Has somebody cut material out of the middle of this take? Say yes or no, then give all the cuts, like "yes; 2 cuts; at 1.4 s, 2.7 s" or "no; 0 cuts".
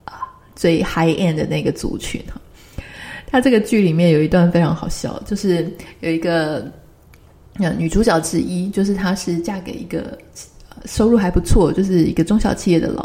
no; 0 cuts